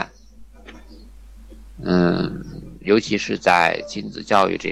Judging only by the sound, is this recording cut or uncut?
uncut